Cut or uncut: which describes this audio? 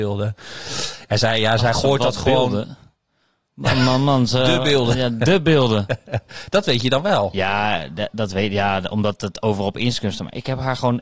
uncut